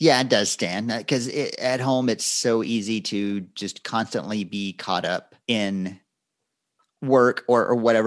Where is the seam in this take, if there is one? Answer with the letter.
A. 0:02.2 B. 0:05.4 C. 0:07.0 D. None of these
B